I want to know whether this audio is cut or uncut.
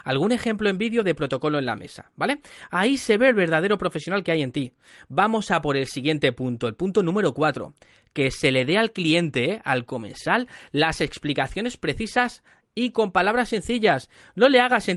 uncut